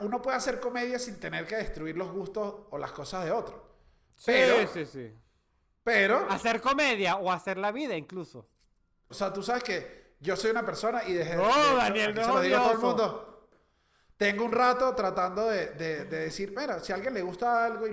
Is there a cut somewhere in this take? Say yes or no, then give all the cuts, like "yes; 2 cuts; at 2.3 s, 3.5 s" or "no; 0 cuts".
yes; 1 cut; at 9.1 s